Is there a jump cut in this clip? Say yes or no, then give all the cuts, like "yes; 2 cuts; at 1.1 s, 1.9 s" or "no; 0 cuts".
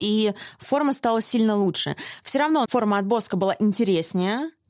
yes; 1 cut; at 2.6 s